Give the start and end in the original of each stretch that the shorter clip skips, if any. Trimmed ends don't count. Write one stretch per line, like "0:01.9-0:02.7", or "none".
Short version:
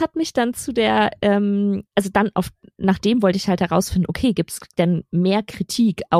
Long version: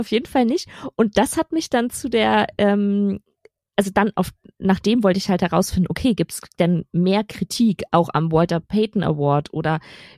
0:03.2-0:03.7